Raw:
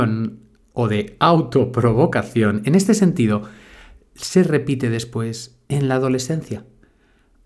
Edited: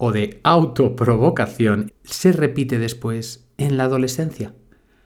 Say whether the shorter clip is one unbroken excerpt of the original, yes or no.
no